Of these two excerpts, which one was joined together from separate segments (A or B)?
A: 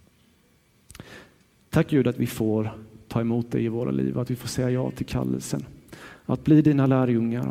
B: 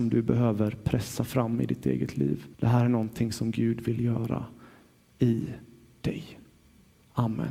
B